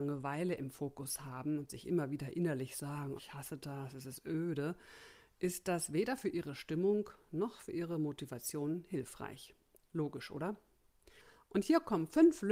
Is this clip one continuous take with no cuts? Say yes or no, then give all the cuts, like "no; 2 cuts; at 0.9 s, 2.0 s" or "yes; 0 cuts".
no; 1 cut; at 3.2 s